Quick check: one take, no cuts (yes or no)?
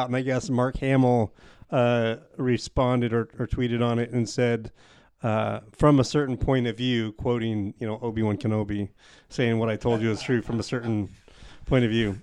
yes